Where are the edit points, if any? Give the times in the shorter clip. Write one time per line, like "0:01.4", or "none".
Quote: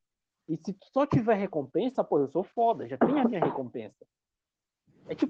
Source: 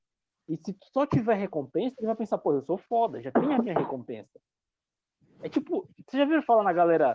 0:01.9

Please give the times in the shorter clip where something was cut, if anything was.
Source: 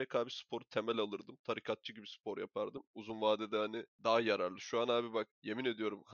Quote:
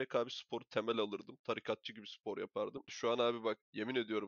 0:02.9

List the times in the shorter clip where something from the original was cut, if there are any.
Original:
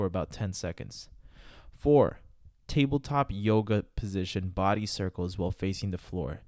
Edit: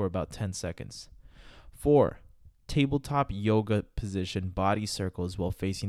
none

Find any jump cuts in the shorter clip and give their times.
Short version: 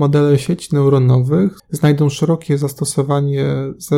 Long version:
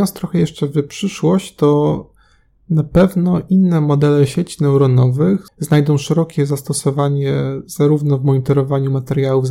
none

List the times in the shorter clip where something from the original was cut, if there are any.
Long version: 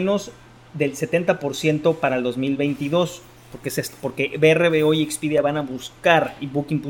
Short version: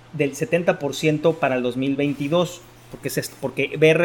none

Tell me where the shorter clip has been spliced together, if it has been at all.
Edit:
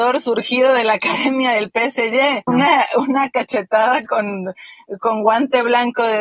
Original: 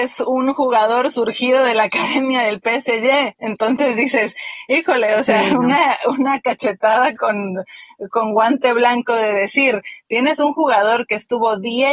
0:02.5

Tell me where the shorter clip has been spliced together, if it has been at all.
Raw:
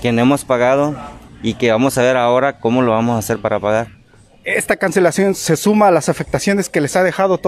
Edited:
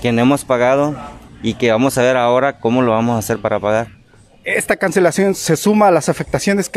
none

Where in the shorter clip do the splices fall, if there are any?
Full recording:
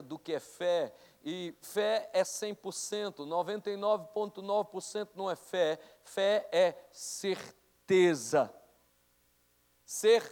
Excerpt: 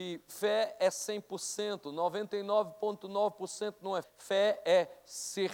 0:04.0

